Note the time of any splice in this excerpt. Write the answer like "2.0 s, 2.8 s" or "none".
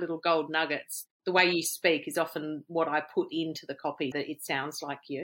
4.1 s

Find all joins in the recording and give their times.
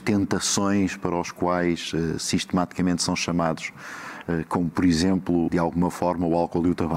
5.5 s

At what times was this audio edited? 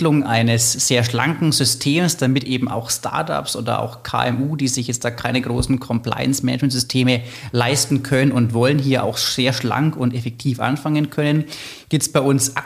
none

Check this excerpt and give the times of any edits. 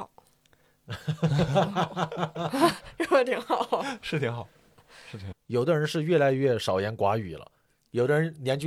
5.3 s

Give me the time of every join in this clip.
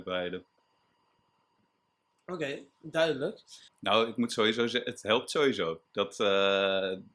3.7 s

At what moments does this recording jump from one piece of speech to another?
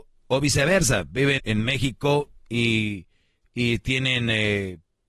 1.4 s

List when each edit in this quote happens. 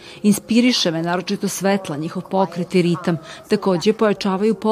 3.4 s

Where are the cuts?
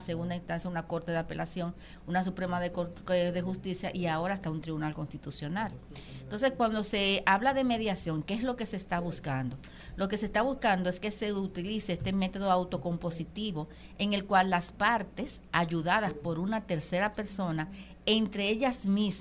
none

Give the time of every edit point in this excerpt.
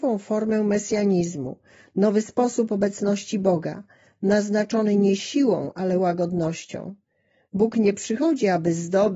none

